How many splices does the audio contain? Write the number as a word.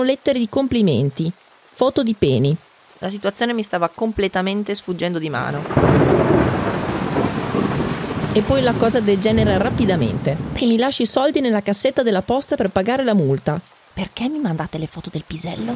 two